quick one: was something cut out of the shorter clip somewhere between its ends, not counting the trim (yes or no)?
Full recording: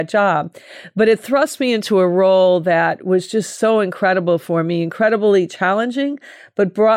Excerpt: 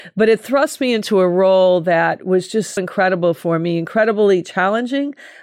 yes